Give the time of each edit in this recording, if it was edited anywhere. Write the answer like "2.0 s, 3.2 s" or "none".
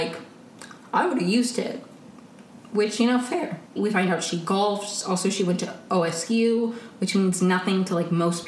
3.8 s